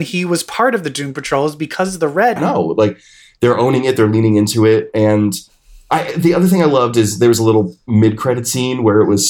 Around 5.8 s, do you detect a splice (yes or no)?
no